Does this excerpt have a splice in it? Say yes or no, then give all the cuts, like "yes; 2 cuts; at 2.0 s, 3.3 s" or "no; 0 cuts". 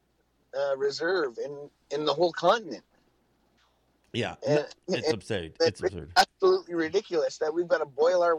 no; 0 cuts